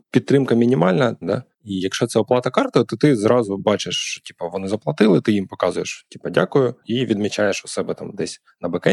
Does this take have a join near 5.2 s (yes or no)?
no